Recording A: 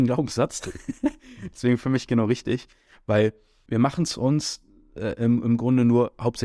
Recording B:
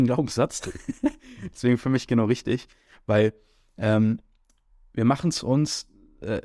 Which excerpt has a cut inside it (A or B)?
A